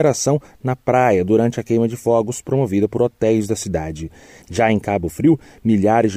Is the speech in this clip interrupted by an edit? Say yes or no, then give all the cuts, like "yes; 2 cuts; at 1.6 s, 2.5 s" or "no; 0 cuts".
yes; 1 cut; at 4.4 s